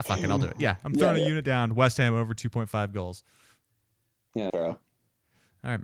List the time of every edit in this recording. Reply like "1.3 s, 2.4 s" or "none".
4.5 s